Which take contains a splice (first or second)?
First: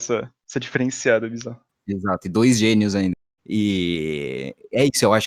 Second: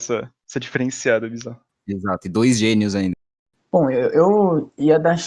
first